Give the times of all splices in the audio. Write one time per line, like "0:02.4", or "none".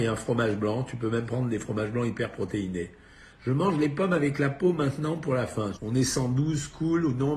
0:03.3
0:05.8